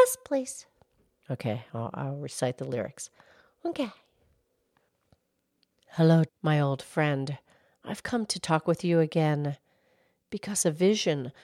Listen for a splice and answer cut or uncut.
cut